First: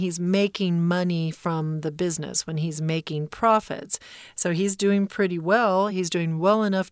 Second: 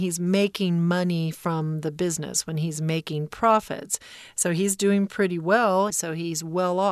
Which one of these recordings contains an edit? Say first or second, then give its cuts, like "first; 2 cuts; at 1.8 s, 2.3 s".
second; 1 cut; at 5.9 s